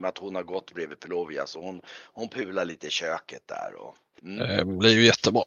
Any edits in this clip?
no; 0 cuts

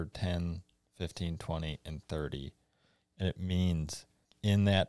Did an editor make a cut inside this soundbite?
no; 0 cuts

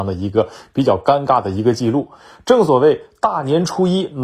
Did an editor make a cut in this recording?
no; 0 cuts

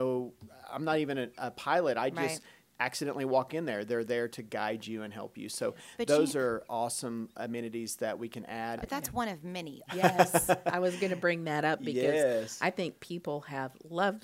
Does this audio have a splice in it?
yes; 2 cuts; at 8.8 s, 9.9 s

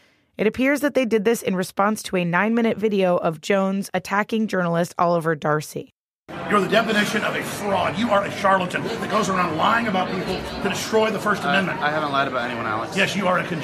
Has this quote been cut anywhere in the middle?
no; 0 cuts

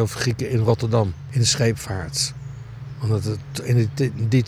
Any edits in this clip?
no; 0 cuts

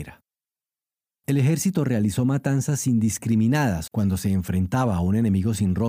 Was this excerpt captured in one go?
no; 1 cut; at 3.9 s

